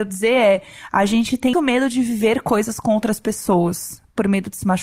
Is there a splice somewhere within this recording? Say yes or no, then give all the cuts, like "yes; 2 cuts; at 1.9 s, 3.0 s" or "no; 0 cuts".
yes; 1 cut; at 1.5 s